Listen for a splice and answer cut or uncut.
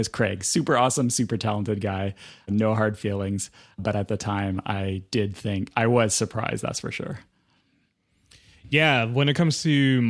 uncut